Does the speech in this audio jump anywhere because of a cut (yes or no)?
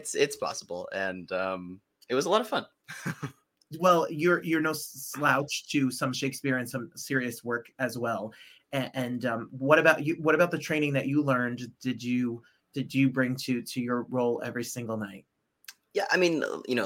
no